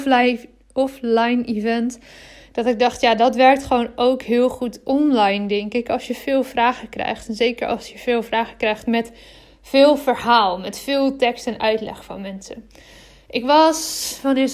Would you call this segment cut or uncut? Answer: uncut